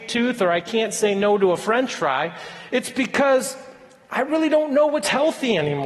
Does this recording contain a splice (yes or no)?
no